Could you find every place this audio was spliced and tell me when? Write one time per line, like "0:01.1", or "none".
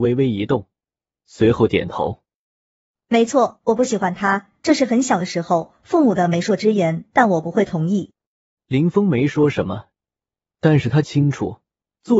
none